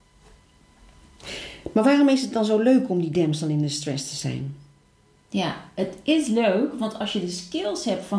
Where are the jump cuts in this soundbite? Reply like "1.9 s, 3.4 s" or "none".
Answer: none